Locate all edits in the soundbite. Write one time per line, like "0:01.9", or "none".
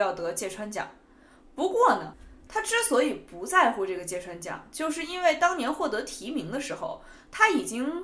0:02.5

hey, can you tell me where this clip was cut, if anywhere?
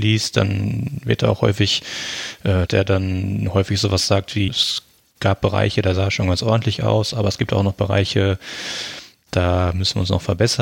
0:02.7
0:04.5

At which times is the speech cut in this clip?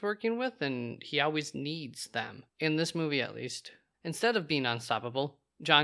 0:02.5
0:03.9

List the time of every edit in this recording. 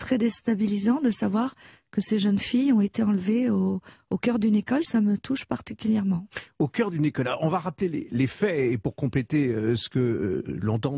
none

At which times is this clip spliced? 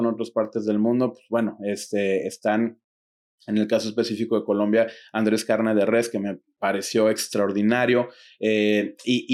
none

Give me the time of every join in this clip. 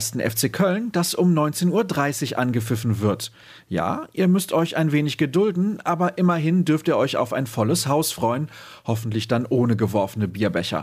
none

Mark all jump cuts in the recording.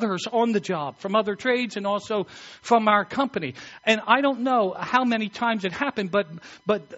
none

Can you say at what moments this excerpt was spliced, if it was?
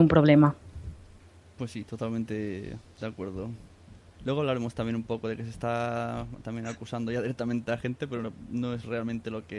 none

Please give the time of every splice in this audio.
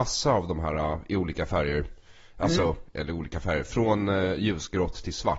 none

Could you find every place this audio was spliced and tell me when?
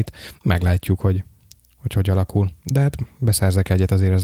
none

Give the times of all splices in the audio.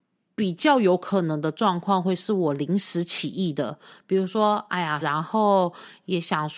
0:05.0

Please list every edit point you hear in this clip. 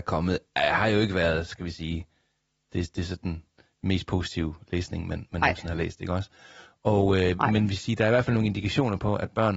0:07.4

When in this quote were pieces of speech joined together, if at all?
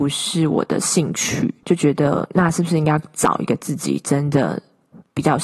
0:01.6

